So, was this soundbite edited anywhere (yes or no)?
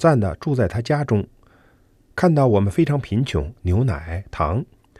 yes